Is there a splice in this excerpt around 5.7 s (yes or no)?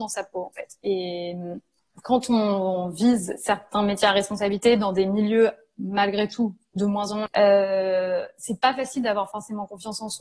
no